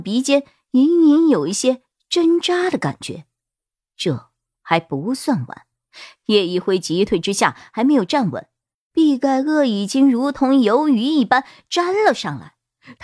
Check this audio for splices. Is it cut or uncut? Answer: uncut